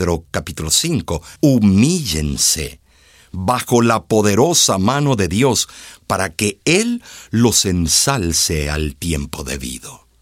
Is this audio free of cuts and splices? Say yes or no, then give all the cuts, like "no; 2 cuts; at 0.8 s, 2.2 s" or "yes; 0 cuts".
no; 1 cut; at 1.4 s